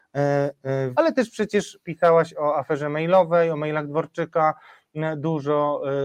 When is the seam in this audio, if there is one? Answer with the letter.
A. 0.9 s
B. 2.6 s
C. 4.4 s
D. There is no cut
A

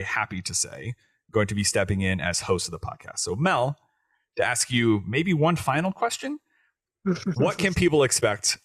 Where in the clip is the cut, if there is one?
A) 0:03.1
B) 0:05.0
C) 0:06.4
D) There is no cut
D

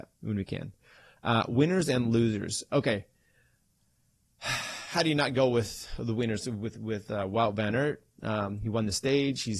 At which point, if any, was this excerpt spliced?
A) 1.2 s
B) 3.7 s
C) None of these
A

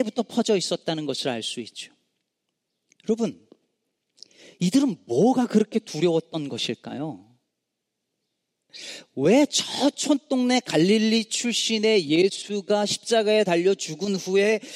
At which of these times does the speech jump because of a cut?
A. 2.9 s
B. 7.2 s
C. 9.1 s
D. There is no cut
D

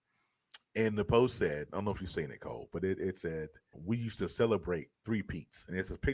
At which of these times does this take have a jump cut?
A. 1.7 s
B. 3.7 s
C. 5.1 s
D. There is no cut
B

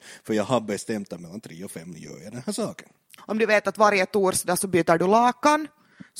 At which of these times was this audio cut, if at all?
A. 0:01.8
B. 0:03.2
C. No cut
B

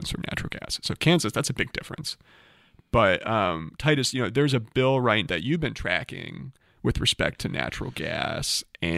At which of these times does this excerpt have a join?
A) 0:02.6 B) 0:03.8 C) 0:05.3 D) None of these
C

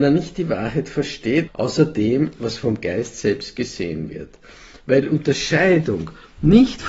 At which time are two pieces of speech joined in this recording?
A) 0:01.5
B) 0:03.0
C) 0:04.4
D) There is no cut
A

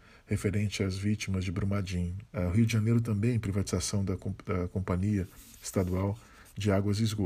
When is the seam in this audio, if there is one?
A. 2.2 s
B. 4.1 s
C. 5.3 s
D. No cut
A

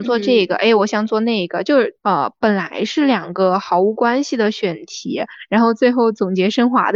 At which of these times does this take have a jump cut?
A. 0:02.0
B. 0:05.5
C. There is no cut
A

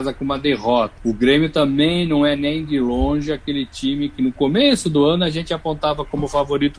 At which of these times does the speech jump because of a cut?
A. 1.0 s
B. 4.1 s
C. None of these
A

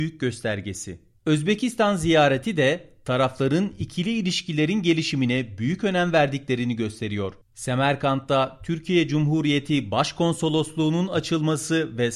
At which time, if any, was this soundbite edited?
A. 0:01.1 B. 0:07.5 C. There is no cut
A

